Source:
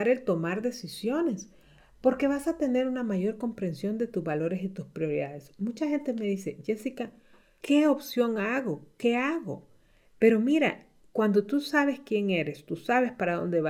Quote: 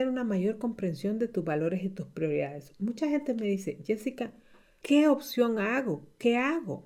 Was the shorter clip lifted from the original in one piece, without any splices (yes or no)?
yes